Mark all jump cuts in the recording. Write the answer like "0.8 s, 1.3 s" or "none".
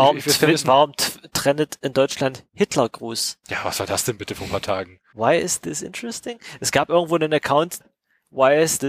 5.1 s, 7.8 s